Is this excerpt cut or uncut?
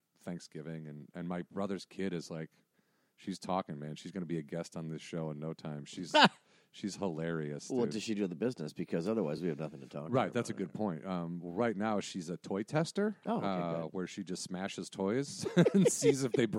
uncut